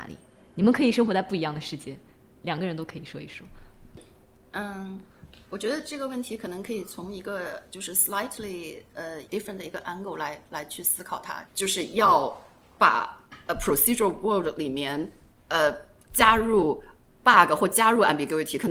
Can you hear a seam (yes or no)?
yes